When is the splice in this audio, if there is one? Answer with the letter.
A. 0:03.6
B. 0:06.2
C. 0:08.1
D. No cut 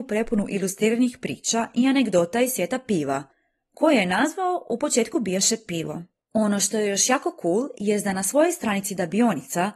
B